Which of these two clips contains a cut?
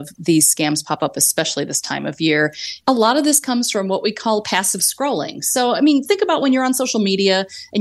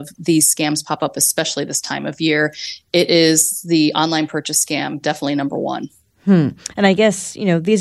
first; 1 cut; at 2.8 s

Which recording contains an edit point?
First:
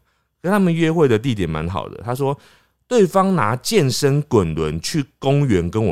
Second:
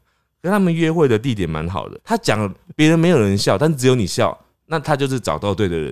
second; 1 cut; at 2.0 s

